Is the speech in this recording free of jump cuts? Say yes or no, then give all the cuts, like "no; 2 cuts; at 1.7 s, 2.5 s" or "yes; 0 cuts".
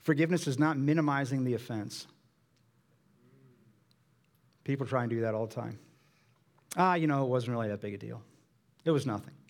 yes; 0 cuts